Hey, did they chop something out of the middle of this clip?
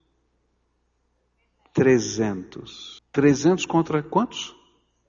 yes; 1 cut; at 3.0 s

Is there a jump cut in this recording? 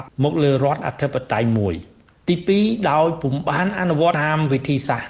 yes; 1 cut; at 4.1 s

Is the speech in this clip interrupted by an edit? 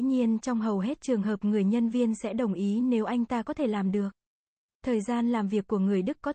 yes; 1 cut; at 4.6 s

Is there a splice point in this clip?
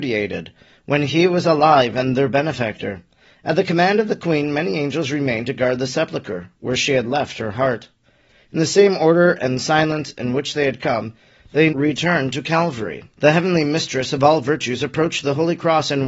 yes; 2 cuts; at 11.7 s, 13.1 s

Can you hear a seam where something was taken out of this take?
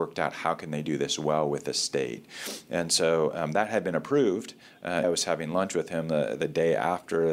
yes; 1 cut; at 5.0 s

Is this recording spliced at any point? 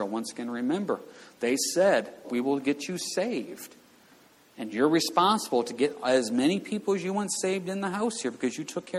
yes; 1 cut; at 2.2 s

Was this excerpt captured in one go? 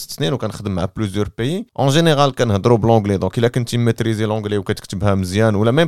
no; 1 cut; at 1.7 s

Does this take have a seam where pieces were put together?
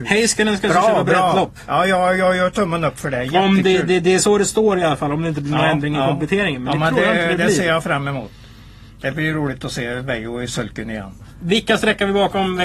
no; 0 cuts

